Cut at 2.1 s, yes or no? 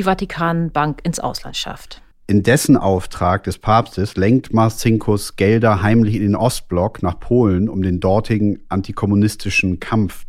yes